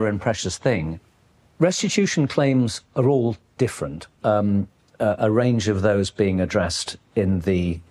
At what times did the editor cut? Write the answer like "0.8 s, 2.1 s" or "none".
4.2 s